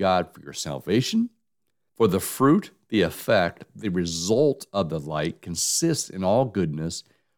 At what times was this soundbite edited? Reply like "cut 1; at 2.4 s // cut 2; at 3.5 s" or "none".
cut 1; at 1.9 s